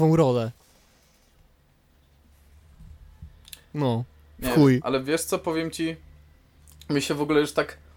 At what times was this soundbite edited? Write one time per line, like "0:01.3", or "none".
0:03.6